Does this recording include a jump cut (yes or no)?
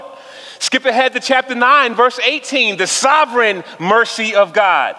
no